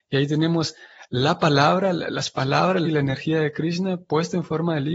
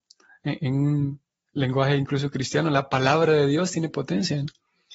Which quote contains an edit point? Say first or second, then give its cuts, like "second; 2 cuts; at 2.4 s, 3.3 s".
first; 1 cut; at 2.8 s